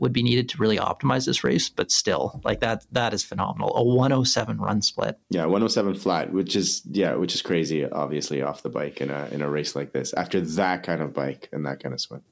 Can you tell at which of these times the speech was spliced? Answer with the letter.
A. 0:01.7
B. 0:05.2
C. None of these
B